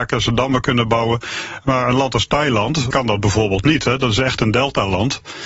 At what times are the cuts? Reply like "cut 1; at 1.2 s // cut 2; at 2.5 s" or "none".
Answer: cut 1; at 2.9 s